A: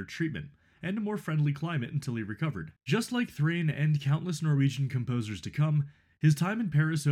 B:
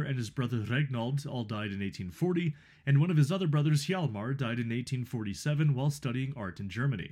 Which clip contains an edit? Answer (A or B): A